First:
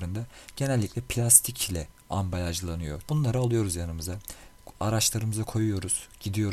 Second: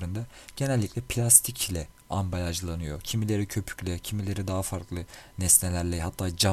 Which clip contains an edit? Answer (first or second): first